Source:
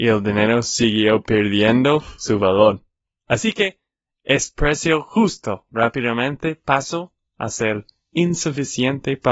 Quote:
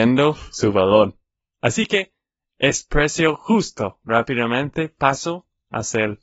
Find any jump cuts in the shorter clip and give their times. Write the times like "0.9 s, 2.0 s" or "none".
none